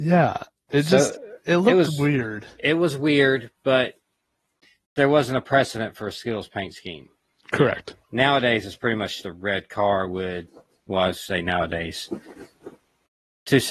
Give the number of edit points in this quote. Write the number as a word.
two